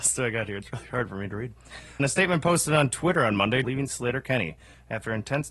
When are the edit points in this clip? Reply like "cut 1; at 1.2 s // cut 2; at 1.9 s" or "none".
cut 1; at 2.0 s // cut 2; at 3.6 s